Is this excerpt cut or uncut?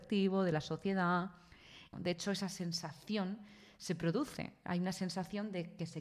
cut